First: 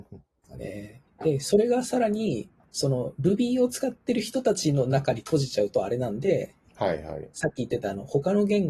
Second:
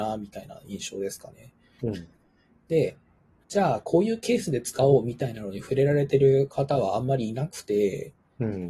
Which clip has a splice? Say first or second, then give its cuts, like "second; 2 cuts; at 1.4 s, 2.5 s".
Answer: second; 2 cuts; at 1.8 s, 3.4 s